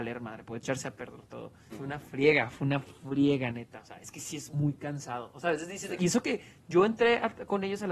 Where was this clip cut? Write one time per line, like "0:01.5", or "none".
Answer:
0:01.7
0:06.0